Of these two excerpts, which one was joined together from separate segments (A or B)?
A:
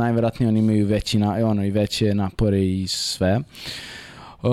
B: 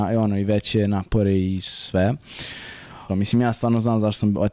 B